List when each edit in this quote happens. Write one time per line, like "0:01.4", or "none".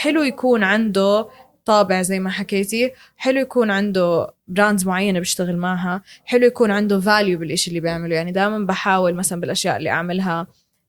0:04.4